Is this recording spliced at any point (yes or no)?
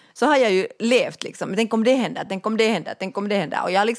no